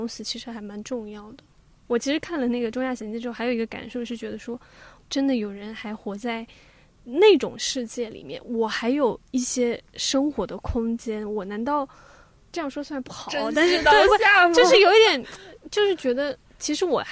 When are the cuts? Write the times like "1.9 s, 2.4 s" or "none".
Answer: 5.0 s